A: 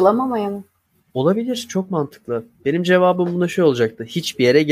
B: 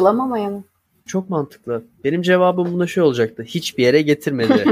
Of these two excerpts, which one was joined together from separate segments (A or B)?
B